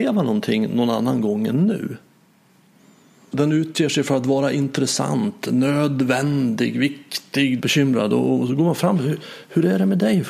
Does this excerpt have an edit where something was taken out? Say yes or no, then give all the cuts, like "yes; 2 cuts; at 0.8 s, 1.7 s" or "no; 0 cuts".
yes; 2 cuts; at 3.3 s, 7.6 s